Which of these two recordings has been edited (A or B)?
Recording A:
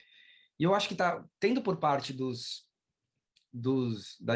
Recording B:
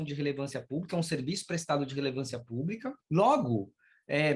B